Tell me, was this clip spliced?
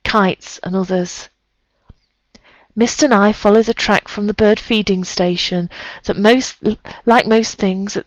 no; 0 cuts

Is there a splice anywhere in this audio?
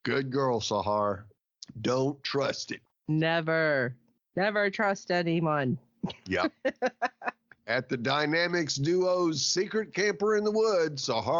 no; 0 cuts

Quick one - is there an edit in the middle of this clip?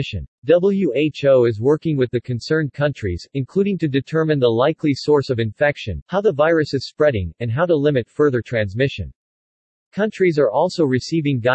no; 0 cuts

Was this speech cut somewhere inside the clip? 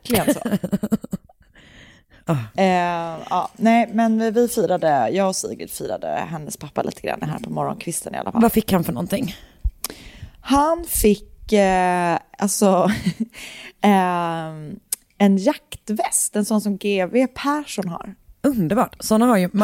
no; 0 cuts

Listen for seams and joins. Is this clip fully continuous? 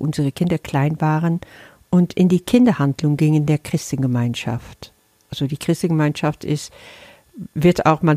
yes; 0 cuts

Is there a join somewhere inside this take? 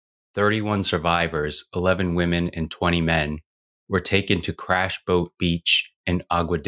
no; 0 cuts

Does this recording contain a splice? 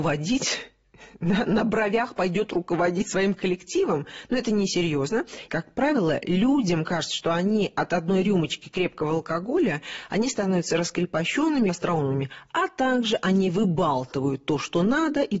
yes; 2 cuts; at 5.5 s, 11.7 s

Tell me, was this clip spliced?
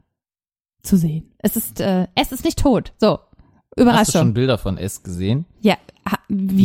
no; 0 cuts

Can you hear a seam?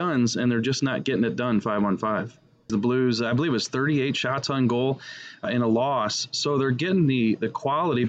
yes; 2 cuts; at 2.7 s, 5.4 s

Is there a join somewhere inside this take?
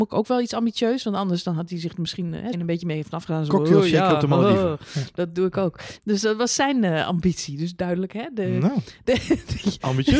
yes; 2 cuts; at 2.5 s, 6.0 s

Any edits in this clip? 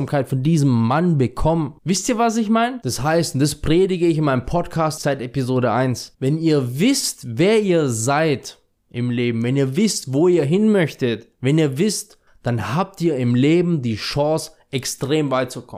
yes; 2 cuts; at 5.0 s, 12.3 s

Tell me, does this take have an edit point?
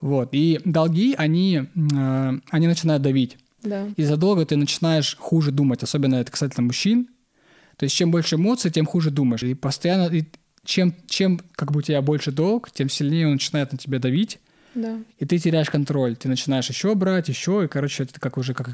yes; 1 cut; at 9.4 s

